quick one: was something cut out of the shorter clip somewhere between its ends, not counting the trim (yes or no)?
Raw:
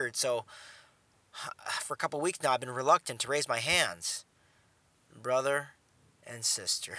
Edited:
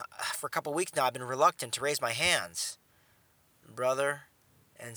no